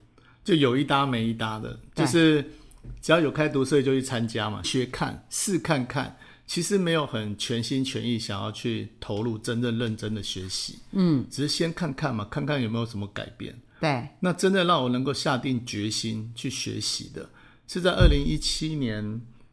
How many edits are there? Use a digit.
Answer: 1